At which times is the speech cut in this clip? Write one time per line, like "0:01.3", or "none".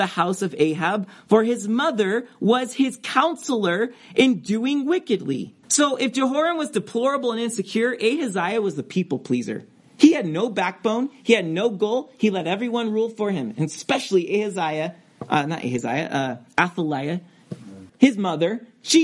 0:05.6
0:17.9